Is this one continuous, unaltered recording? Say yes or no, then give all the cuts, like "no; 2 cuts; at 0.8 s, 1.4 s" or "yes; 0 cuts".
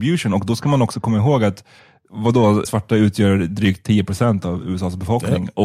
no; 1 cut; at 2.6 s